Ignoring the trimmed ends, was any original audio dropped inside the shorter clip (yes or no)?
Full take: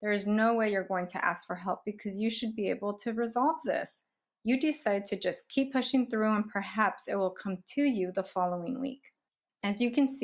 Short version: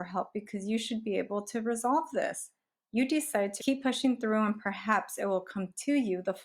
yes